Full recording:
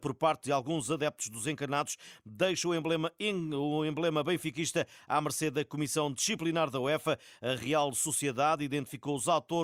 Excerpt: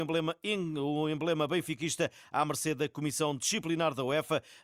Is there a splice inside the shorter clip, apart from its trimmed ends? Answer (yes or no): no